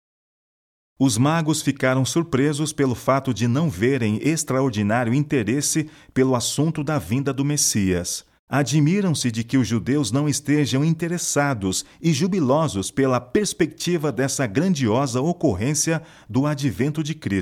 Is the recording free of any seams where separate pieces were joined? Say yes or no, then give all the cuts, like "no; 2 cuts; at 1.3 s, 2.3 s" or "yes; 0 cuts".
no; 1 cut; at 8.4 s